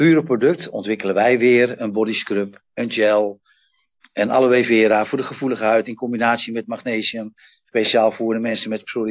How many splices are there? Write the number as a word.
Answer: zero